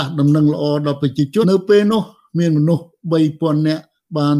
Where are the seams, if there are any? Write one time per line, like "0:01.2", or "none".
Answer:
0:01.4